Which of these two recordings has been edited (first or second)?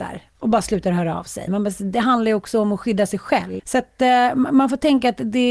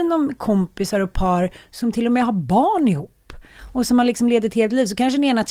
first